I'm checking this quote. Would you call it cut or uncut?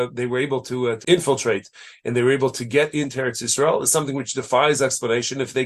cut